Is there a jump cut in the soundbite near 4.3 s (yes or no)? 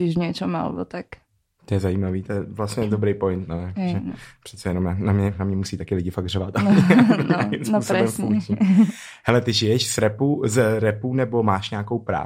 no